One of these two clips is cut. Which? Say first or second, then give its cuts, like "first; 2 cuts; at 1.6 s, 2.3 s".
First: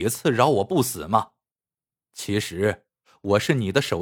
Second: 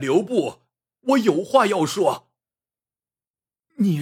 second; 1 cut; at 2.9 s